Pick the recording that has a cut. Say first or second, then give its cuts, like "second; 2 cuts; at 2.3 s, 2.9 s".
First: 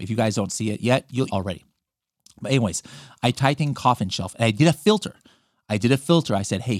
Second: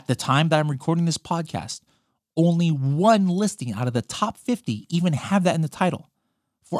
first; 1 cut; at 1.3 s